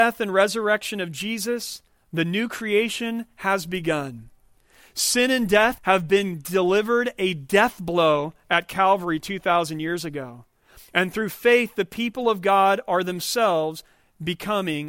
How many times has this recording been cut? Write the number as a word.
one